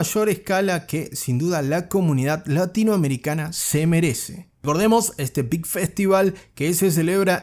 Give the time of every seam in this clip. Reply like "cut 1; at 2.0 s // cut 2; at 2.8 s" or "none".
cut 1; at 4.5 s